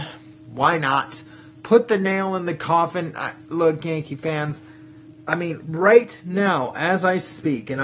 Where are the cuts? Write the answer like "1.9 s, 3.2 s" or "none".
none